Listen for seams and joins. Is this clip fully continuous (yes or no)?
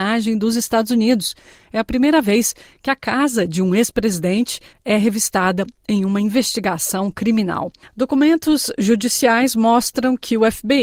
no